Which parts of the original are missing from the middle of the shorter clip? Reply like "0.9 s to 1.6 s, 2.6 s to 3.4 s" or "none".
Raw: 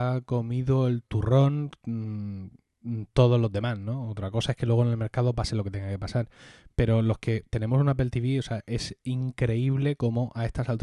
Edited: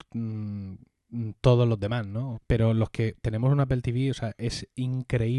4.1 s to 6.6 s